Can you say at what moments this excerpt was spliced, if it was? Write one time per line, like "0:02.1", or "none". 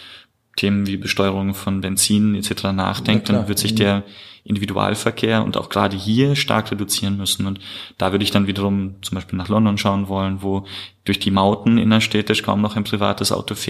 none